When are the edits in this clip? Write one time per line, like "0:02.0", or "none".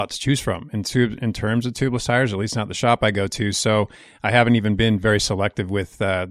none